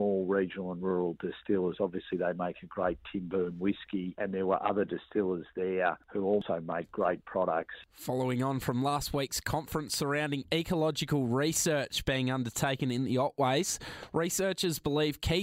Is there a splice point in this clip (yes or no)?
no